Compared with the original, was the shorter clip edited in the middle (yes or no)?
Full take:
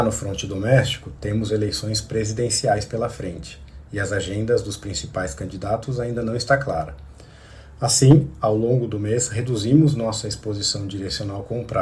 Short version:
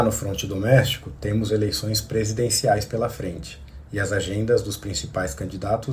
no